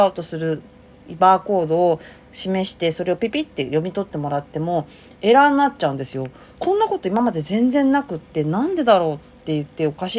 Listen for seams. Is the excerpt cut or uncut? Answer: uncut